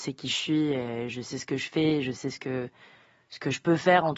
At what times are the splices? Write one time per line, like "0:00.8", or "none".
none